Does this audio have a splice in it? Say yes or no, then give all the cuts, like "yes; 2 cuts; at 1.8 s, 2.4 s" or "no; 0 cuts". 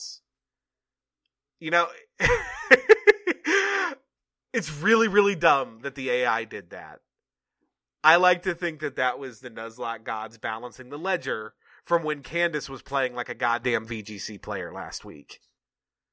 no; 0 cuts